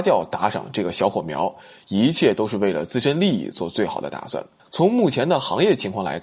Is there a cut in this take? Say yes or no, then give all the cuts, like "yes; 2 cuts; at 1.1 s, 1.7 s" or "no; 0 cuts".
yes; 1 cut; at 4.7 s